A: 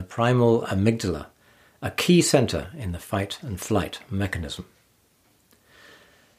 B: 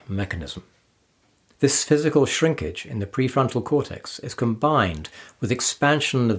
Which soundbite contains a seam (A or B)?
B